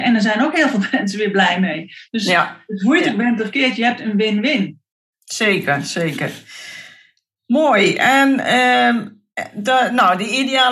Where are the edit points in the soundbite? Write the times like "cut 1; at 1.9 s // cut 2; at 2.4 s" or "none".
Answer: none

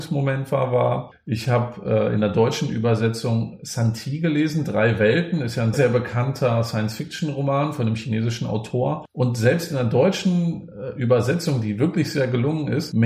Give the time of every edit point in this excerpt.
cut 1; at 5.7 s

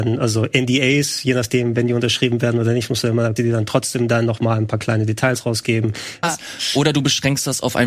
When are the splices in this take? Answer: cut 1; at 3.4 s // cut 2; at 6.2 s

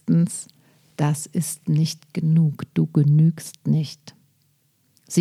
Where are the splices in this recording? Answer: none

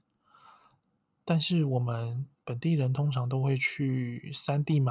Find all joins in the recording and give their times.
none

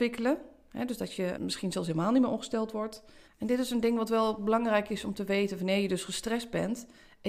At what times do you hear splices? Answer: cut 1; at 1.3 s // cut 2; at 3.2 s

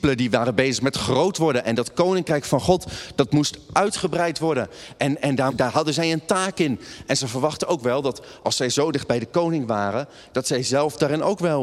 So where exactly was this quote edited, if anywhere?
cut 1; at 5.5 s

